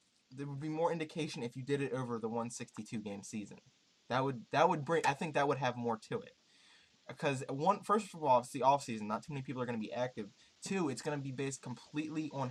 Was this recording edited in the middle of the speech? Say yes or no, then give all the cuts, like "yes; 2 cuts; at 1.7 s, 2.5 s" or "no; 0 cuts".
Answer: no; 0 cuts